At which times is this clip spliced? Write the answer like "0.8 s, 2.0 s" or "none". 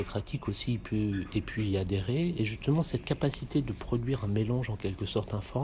none